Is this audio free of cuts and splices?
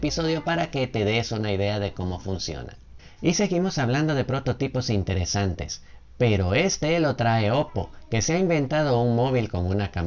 no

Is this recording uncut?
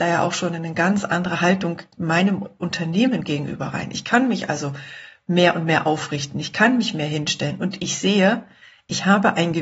yes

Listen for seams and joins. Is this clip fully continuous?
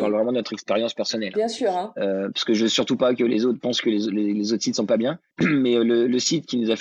yes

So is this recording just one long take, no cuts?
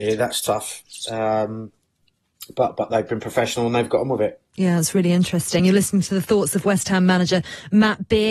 yes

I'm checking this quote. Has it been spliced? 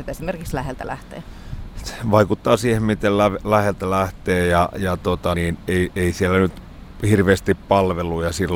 yes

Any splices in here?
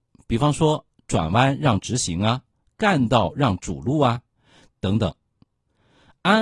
yes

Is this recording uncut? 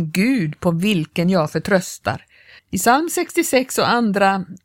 no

